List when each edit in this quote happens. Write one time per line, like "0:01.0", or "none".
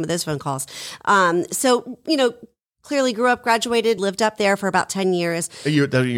0:04.0